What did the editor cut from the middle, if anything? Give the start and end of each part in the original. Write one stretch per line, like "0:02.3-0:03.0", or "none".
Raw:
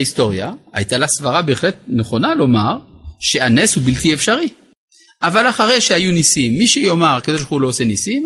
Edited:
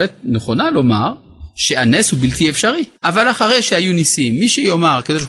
0:04.6-0:05.1